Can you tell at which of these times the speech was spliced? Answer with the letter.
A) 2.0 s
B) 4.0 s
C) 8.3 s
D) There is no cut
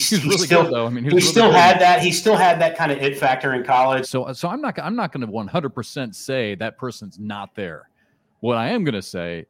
B